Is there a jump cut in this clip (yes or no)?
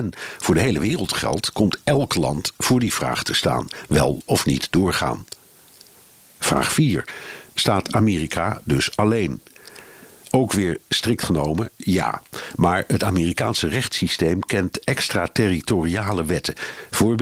no